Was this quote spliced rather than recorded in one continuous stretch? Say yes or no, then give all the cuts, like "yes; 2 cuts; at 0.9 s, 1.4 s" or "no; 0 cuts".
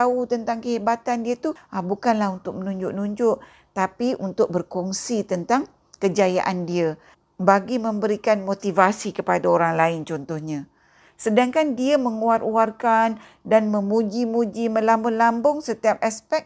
yes; 1 cut; at 1.6 s